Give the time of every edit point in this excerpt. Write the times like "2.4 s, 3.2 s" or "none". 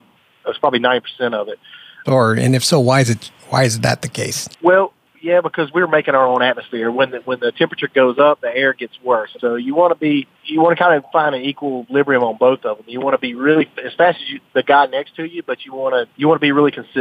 2.1 s, 4.5 s, 9.4 s